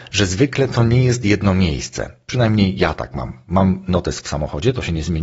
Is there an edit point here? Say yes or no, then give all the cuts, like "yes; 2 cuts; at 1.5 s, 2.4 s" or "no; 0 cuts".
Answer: no; 0 cuts